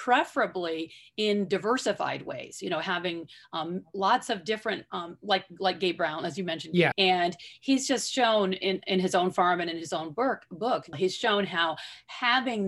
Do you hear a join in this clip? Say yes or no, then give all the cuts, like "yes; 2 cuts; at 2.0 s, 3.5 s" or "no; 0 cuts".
yes; 2 cuts; at 6.9 s, 10.9 s